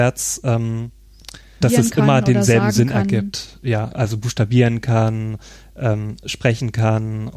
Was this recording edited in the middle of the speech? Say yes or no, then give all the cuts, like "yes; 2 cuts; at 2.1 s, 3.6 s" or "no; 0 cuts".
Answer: yes; 1 cut; at 1.6 s